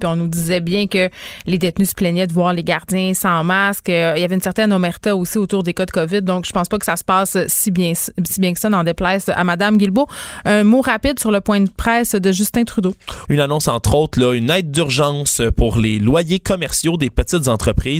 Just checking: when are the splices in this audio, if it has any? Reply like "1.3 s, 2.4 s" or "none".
13.3 s

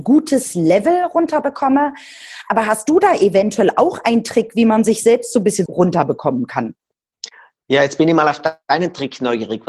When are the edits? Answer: 5.7 s

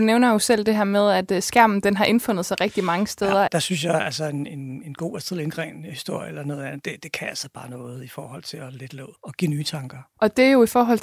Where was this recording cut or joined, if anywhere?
3.5 s, 9.1 s

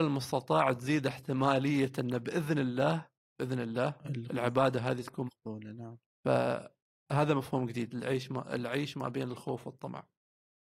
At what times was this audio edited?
5.3 s

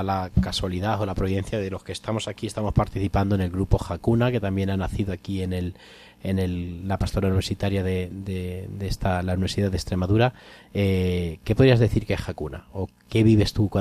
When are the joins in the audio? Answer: none

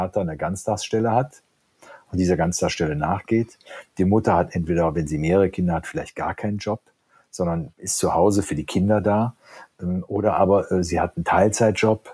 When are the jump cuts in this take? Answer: none

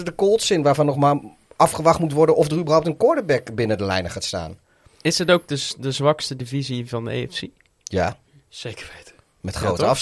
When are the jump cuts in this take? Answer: none

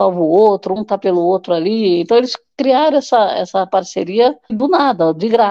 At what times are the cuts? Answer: 4.5 s

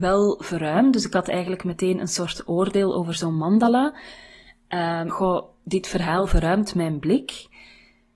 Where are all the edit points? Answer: 5.1 s

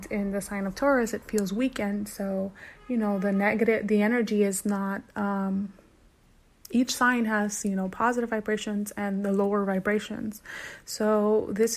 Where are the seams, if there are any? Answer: none

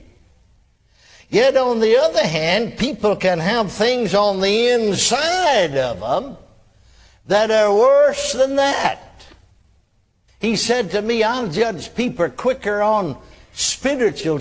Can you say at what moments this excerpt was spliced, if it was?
10.3 s

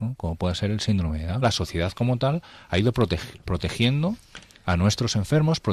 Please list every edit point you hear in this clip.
1.4 s

